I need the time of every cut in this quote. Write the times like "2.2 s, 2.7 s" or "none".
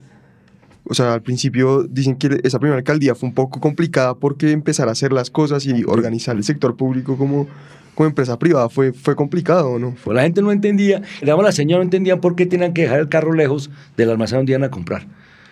10.1 s, 11.2 s